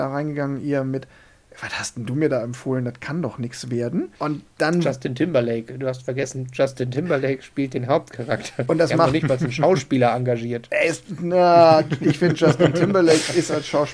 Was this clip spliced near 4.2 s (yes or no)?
yes